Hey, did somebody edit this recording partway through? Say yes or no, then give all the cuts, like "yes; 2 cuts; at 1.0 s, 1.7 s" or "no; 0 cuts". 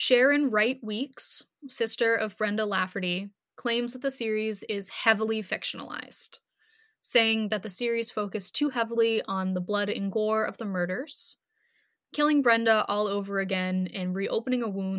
no; 0 cuts